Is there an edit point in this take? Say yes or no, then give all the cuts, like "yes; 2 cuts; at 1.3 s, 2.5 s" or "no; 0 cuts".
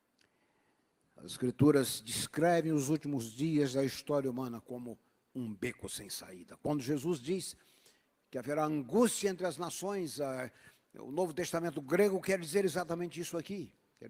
yes; 1 cut; at 1.0 s